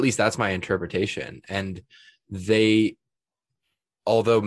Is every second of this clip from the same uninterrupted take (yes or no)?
yes